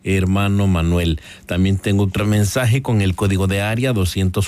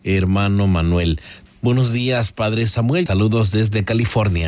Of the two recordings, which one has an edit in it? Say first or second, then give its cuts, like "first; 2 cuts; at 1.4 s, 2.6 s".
second; 2 cuts; at 1.5 s, 3.1 s